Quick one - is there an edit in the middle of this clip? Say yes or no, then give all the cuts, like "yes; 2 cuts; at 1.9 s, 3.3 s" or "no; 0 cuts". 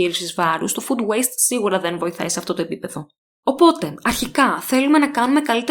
no; 0 cuts